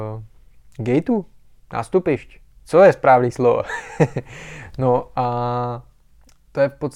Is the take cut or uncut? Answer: uncut